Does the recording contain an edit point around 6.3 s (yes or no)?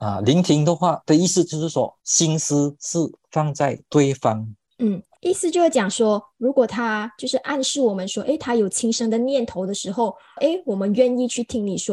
no